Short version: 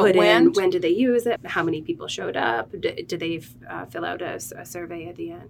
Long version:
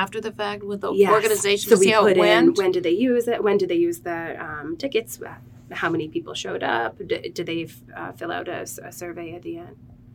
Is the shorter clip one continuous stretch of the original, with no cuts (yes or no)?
no